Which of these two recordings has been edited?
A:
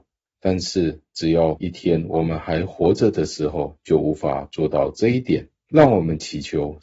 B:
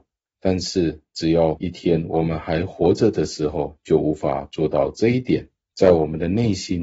B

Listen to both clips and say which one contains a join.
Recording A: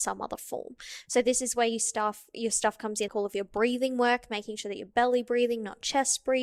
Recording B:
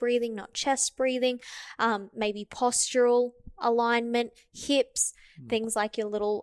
A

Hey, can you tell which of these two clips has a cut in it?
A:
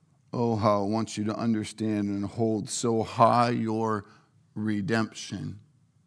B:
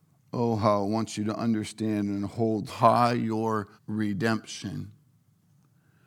B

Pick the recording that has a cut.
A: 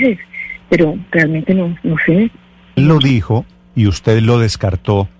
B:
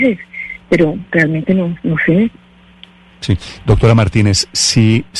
A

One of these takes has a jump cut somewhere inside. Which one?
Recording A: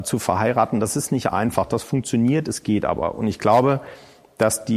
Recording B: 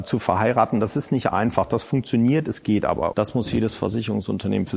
B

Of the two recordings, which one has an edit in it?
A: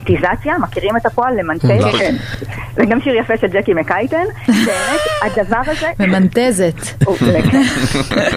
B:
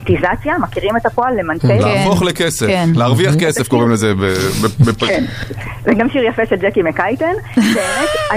A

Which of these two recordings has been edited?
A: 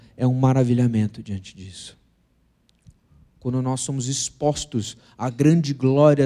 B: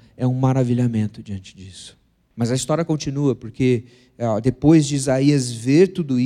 B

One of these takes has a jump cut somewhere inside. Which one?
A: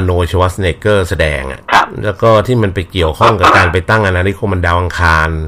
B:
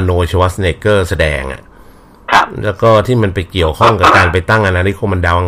A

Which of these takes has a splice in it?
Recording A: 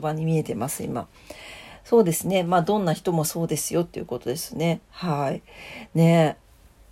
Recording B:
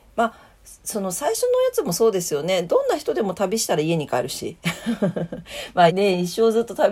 B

